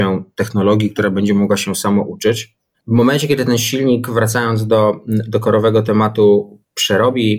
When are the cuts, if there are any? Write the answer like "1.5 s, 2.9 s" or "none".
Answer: 2.7 s